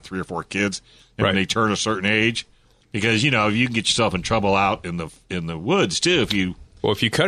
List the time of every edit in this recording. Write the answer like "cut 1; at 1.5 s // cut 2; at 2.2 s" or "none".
cut 1; at 2.8 s